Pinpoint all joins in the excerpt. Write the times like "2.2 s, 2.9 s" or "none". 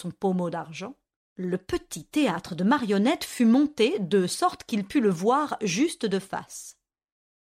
1.2 s